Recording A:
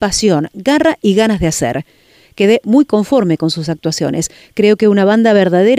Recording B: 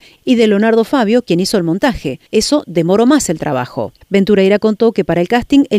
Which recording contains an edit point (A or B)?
B